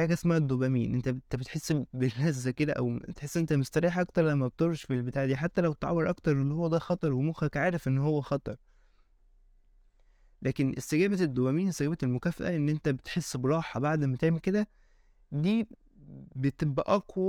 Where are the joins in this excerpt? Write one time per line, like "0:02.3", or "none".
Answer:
none